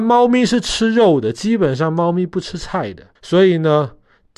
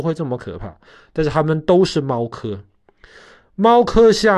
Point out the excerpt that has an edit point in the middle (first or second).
first